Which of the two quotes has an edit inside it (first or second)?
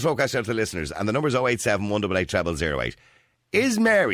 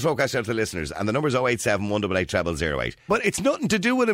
second